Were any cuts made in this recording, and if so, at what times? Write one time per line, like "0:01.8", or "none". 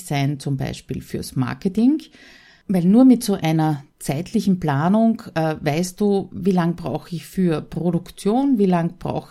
none